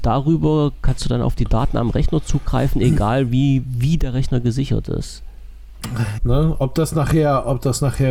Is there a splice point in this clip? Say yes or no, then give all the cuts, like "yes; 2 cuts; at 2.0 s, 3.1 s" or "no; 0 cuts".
yes; 1 cut; at 6.2 s